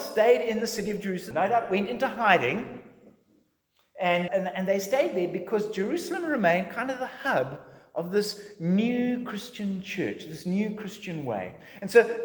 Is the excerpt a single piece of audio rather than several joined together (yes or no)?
no